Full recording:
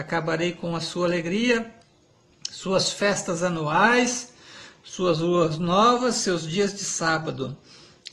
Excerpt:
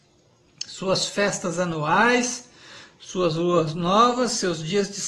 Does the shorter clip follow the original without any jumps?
yes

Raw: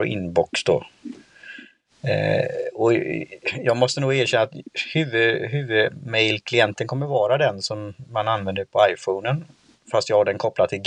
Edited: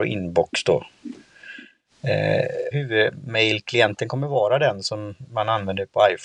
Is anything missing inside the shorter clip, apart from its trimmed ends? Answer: yes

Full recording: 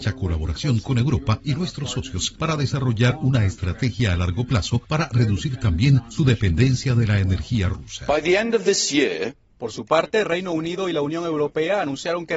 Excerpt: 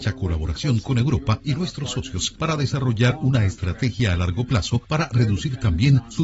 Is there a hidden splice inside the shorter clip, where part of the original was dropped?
no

